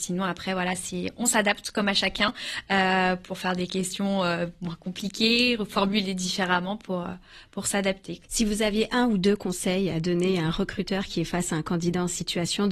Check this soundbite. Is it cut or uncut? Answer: cut